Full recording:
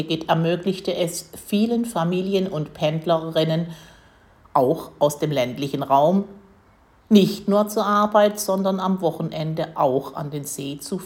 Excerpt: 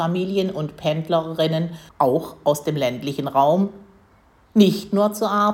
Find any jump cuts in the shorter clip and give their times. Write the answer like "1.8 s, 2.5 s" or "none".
1.9 s